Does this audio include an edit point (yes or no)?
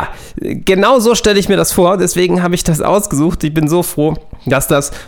no